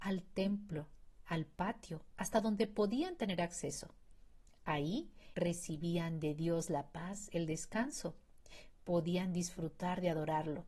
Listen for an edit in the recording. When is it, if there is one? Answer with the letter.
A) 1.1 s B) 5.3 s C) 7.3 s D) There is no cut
B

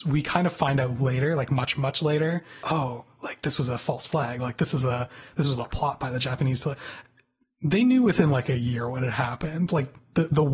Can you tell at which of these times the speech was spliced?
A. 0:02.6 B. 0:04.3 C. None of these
A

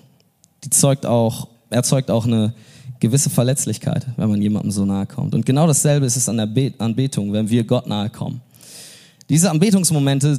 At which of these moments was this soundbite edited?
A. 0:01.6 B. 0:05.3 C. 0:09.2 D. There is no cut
D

